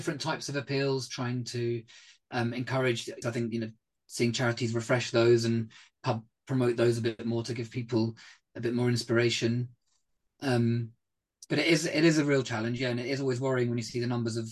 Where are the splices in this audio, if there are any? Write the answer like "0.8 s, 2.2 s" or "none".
3.2 s